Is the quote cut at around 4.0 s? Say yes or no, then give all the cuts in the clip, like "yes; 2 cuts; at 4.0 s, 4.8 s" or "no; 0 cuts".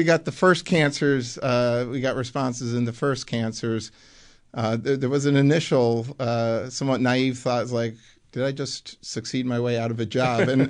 no; 0 cuts